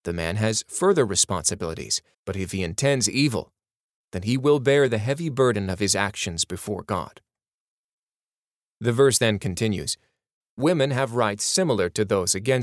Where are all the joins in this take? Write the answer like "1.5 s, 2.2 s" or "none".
2.1 s